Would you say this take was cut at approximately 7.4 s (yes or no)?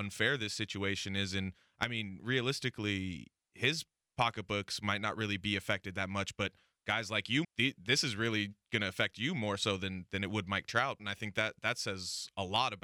yes